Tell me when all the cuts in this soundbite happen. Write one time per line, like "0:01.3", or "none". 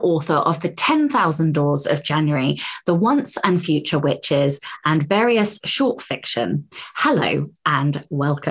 none